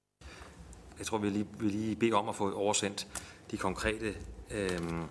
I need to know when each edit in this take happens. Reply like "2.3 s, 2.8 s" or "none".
1.0 s

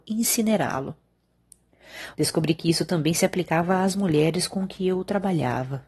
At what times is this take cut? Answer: 2.1 s

